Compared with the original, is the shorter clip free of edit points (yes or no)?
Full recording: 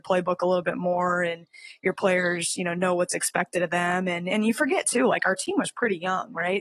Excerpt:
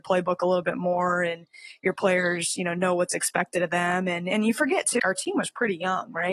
no